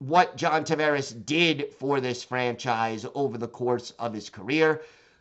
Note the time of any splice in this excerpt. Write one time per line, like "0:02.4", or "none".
none

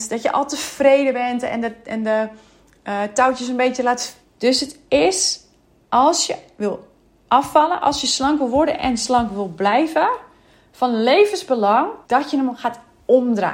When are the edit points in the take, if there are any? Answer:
0:04.2
0:12.0

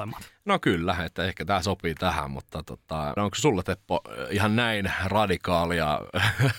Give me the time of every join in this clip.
0:03.2

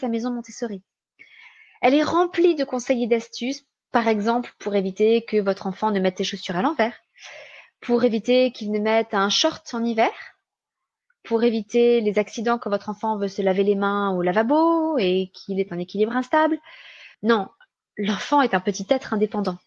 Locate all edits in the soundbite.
0:17.1

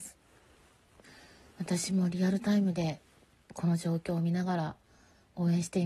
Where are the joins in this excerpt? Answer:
none

